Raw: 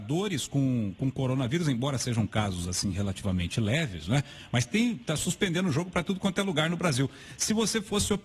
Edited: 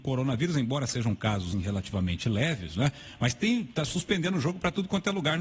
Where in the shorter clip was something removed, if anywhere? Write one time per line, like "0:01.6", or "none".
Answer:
0:01.5